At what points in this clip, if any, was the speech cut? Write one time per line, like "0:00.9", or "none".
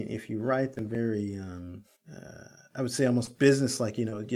none